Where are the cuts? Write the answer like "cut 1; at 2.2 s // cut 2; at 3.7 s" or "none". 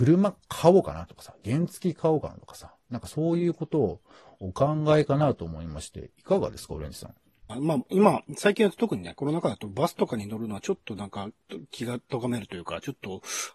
cut 1; at 7.5 s